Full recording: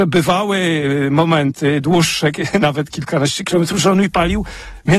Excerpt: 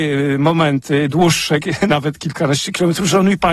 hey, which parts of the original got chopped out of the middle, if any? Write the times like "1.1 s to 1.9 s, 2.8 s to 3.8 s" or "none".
none